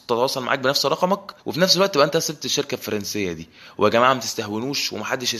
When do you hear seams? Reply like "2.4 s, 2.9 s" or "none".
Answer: 1.4 s